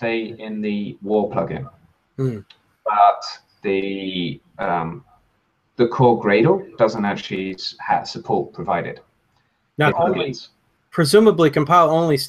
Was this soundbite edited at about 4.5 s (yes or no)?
no